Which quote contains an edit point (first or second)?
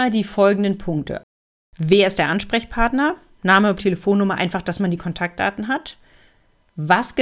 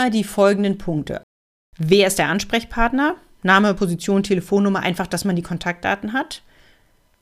first